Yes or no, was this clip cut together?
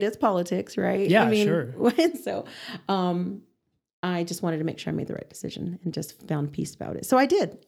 no